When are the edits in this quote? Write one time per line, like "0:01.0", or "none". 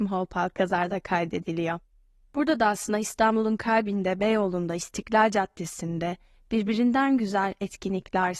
none